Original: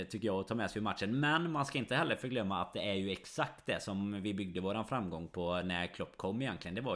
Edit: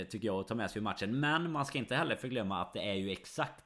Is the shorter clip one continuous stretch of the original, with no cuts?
yes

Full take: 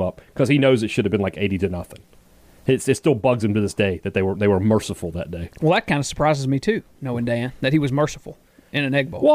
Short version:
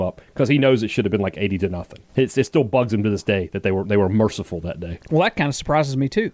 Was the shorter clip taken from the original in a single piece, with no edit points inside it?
no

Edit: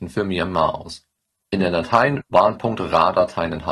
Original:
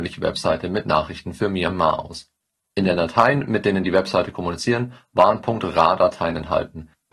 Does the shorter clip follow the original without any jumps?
no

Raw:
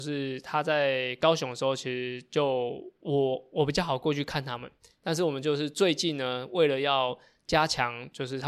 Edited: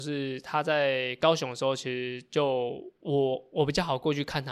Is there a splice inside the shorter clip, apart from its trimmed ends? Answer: no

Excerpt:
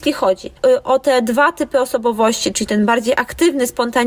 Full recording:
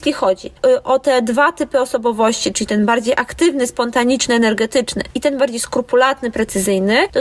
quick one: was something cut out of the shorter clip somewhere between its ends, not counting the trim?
no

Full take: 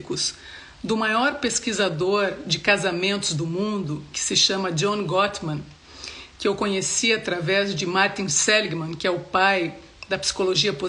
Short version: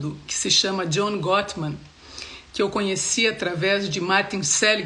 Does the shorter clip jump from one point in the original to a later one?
no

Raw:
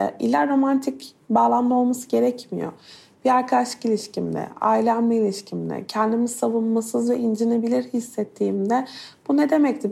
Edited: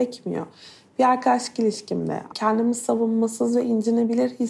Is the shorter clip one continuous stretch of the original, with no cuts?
no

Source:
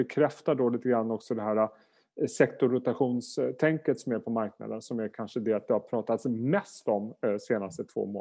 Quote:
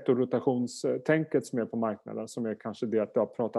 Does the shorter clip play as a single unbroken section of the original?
yes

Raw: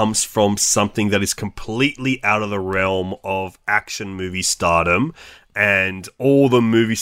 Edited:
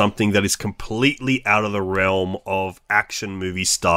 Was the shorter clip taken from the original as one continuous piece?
yes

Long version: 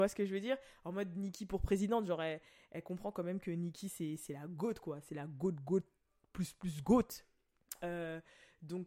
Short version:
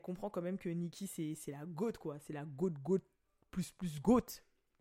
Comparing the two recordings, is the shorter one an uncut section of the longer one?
yes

